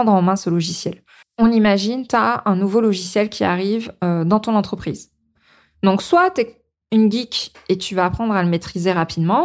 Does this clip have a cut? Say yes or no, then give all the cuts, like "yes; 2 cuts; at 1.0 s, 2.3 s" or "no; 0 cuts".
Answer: yes; 1 cut; at 1.2 s